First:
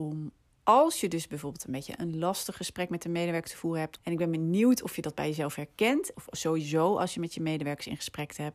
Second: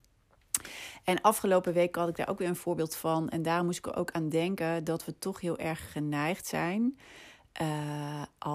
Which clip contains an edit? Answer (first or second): first